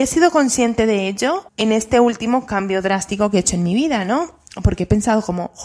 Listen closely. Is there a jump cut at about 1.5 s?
yes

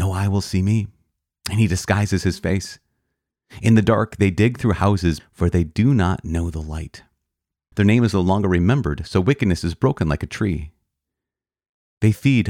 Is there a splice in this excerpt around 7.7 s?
yes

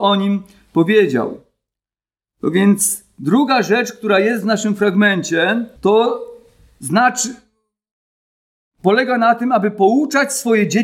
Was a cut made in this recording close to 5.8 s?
yes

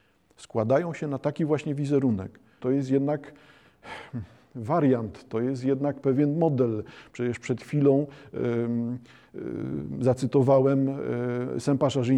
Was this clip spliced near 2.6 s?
yes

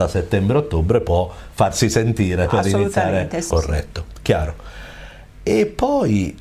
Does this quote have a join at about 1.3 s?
no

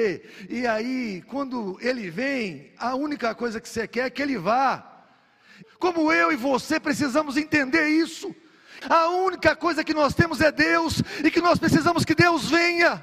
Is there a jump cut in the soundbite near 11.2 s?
no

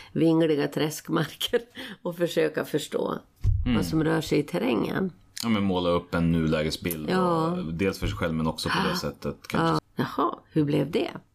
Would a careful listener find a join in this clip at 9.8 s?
yes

